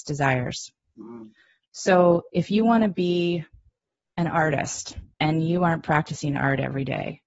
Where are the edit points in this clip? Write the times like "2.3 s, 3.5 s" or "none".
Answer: 5.1 s